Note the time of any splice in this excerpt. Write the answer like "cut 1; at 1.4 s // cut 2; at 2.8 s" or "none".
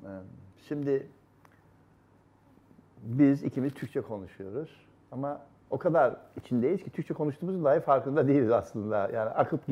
none